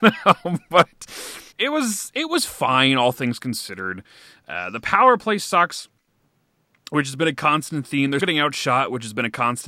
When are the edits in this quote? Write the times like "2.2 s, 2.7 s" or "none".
1.5 s, 8.2 s

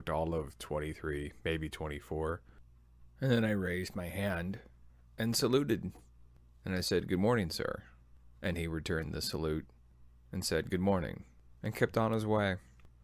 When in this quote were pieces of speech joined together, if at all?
none

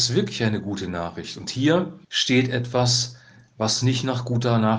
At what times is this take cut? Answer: 2.0 s

